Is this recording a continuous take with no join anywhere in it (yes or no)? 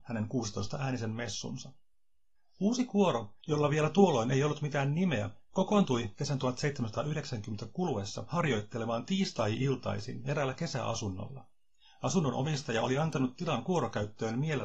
yes